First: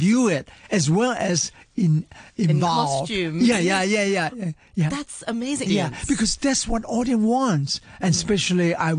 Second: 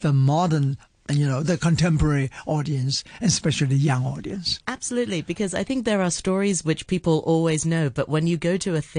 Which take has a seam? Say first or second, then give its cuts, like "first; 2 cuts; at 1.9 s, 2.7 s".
first; 1 cut; at 5.7 s